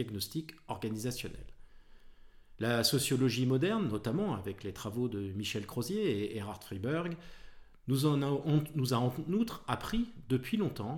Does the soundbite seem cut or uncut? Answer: cut